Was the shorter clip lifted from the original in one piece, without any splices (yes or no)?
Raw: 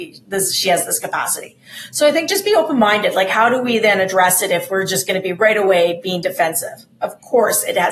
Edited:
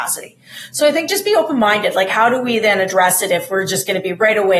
yes